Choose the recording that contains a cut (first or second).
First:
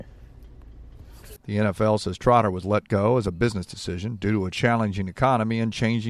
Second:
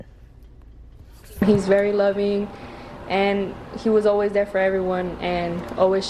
first